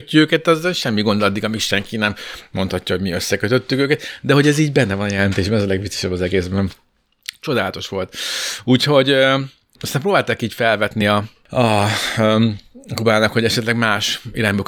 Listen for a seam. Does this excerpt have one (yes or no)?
no